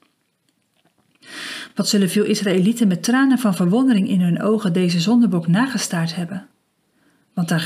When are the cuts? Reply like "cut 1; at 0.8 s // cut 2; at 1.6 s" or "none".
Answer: none